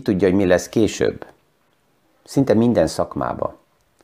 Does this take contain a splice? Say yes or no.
yes